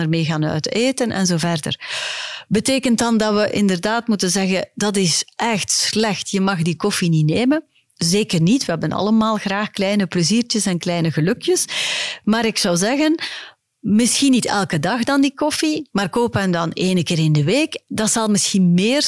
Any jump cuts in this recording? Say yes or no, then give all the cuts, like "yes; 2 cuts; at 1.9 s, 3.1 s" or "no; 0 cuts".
no; 0 cuts